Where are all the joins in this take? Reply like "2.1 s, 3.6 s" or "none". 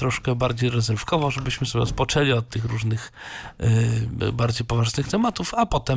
none